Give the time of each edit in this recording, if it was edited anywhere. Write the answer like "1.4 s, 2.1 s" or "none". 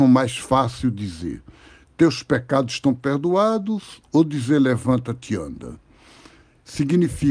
none